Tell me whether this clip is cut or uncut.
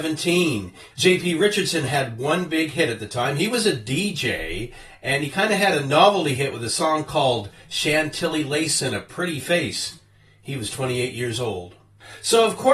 cut